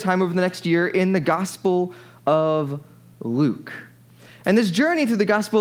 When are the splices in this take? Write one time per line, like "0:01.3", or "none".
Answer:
none